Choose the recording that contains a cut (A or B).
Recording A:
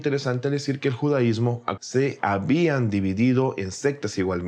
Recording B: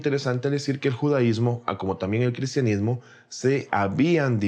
A